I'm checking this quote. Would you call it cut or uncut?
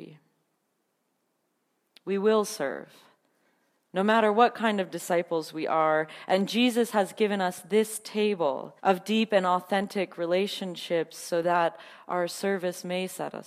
cut